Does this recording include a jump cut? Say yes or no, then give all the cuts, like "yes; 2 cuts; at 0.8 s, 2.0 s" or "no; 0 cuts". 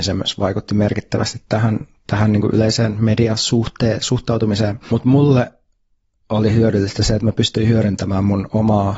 no; 0 cuts